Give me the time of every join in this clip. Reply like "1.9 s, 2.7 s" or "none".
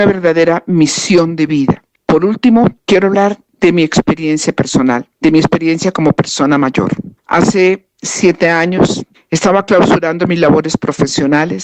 2.0 s